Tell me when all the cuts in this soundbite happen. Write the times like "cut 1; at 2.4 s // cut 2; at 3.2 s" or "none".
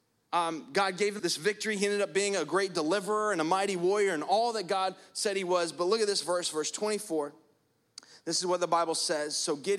cut 1; at 1.2 s